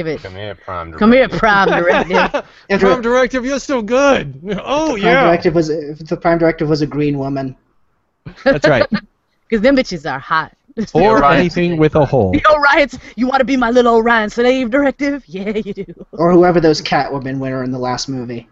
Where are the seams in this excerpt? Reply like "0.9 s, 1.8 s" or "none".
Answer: 2.8 s

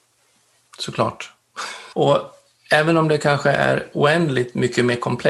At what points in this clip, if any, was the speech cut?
1.9 s

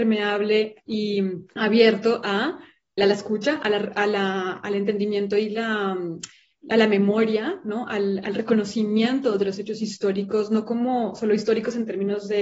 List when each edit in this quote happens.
1.5 s, 3.0 s

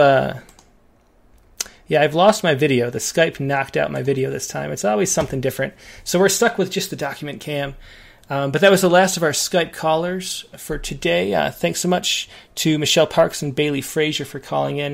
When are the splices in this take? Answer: none

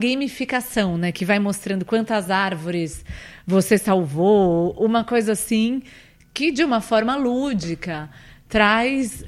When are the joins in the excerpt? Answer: none

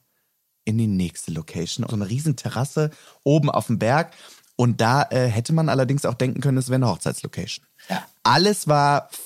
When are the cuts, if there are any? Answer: 1.9 s

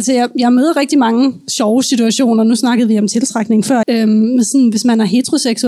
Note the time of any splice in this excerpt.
3.8 s

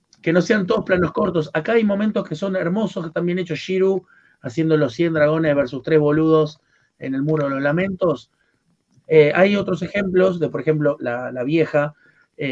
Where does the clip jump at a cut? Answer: 9.0 s, 11.0 s

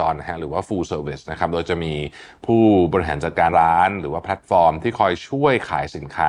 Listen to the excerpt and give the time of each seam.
3.5 s

